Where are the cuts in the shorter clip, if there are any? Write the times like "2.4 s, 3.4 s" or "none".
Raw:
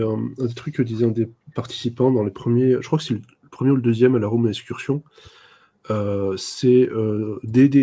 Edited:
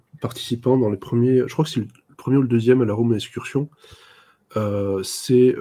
none